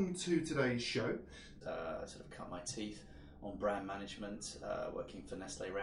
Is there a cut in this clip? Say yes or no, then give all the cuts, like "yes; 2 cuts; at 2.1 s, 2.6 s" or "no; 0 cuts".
yes; 1 cut; at 1.6 s